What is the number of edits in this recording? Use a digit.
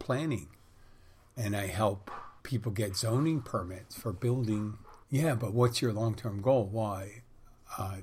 2